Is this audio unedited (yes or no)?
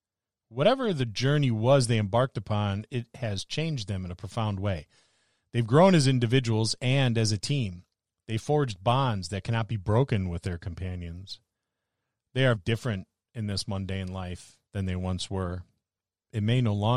no